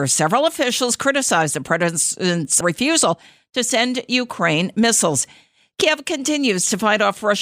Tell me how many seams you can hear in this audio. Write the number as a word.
one